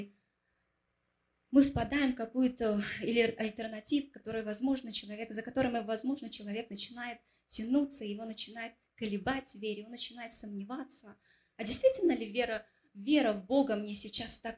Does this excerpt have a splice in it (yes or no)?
no